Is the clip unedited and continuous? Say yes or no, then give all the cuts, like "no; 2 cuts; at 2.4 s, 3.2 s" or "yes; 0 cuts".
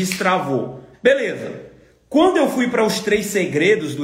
no; 1 cut; at 0.9 s